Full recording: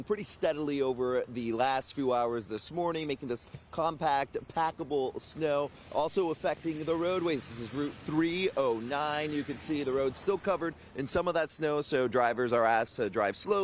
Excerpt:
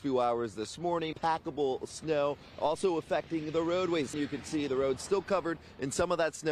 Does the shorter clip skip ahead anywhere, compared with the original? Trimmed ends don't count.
yes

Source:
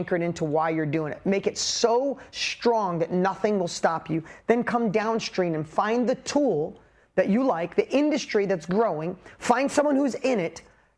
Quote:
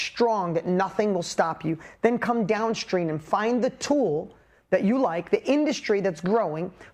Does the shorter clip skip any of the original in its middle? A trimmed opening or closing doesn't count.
no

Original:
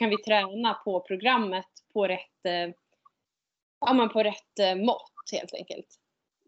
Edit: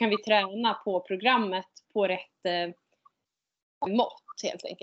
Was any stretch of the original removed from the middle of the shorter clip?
yes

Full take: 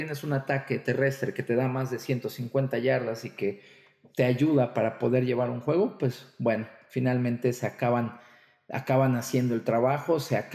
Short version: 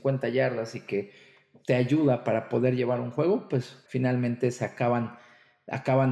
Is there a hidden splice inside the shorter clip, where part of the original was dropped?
yes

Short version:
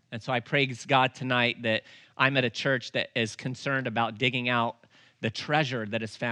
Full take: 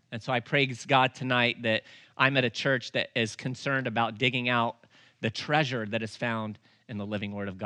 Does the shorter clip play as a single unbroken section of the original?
yes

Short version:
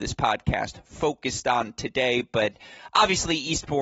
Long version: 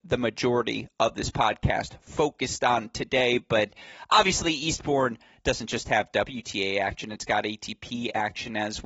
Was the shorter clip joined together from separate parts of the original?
no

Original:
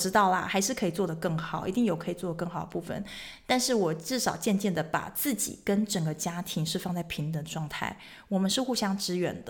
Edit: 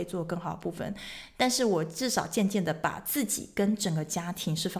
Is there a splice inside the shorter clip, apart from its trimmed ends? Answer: no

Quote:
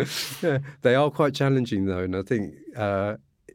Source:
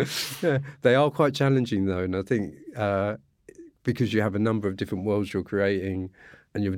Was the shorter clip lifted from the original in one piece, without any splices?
yes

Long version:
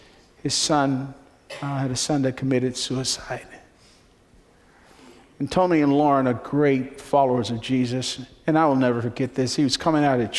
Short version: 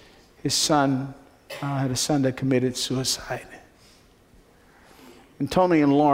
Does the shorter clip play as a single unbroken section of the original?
yes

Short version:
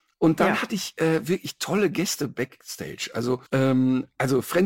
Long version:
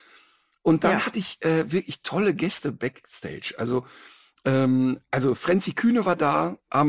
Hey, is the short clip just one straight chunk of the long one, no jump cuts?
no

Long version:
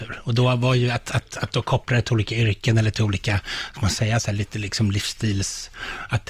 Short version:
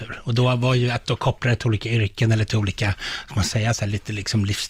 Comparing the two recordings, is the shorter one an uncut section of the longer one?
no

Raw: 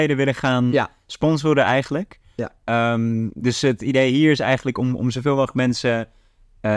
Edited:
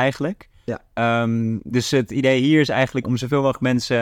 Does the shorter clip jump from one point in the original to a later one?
yes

